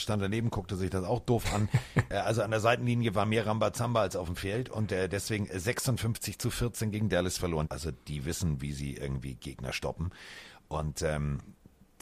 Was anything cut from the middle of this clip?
yes; 1 cut; at 7.7 s

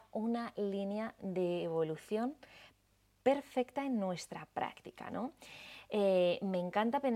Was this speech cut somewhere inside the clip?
no; 0 cuts

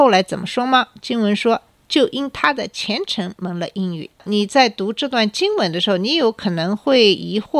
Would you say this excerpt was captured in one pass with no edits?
no; 1 cut; at 4.1 s

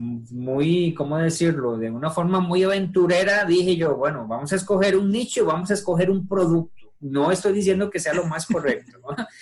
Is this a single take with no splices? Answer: no; 1 cut; at 6.9 s

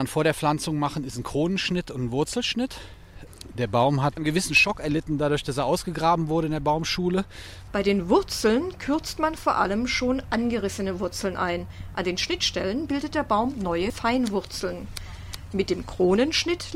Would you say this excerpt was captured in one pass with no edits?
no; 1 cut; at 7.7 s

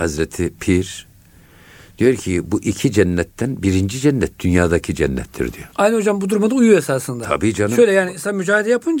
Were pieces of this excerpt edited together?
yes; 1 cut; at 5.7 s

